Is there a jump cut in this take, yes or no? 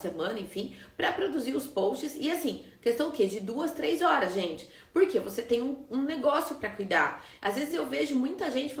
no